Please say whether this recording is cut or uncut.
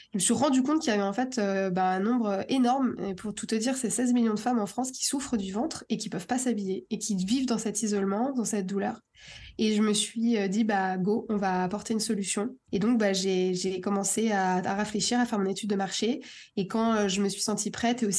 uncut